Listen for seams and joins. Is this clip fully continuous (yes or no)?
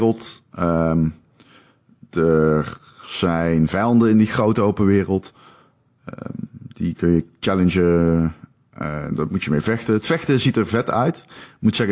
yes